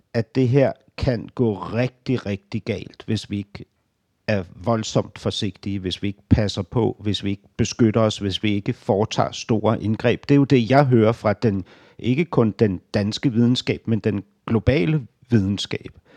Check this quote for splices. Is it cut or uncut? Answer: uncut